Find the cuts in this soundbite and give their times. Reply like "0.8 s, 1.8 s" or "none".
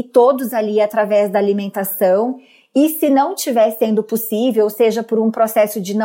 none